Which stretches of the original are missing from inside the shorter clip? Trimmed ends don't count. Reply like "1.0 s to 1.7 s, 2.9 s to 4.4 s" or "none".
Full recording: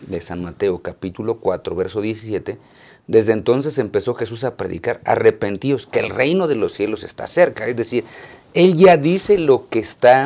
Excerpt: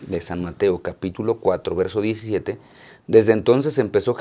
none